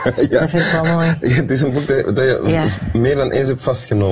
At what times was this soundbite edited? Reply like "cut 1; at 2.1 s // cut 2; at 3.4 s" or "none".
none

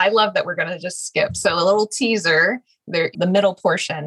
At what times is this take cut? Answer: cut 1; at 3.1 s

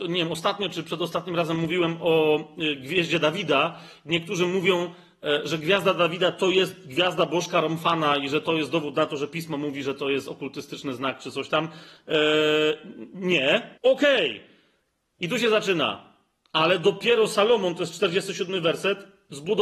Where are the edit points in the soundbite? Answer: cut 1; at 13.8 s

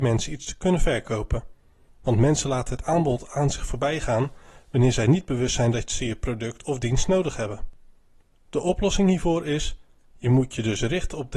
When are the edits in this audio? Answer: cut 1; at 1.9 s

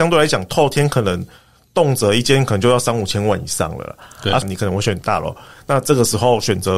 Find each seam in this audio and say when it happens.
cut 1; at 4.4 s

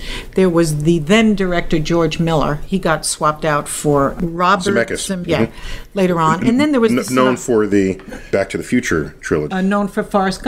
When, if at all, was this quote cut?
cut 1; at 5.2 s

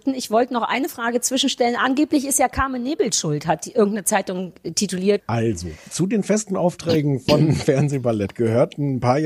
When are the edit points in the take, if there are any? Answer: cut 1; at 5.2 s

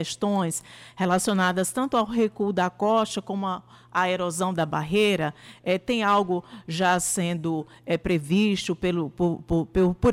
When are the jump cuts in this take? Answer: none

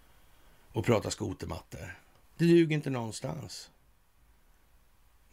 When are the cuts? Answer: cut 1; at 2.2 s

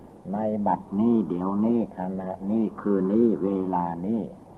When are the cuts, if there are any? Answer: cut 1; at 3.0 s

